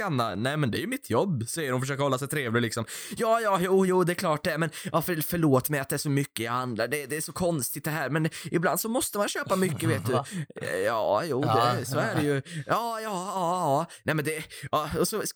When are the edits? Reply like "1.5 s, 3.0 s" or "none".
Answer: none